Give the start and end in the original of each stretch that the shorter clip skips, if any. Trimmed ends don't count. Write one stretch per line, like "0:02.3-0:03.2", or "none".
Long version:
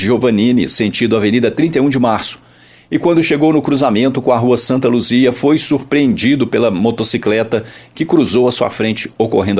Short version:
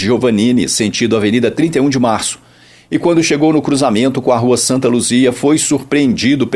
none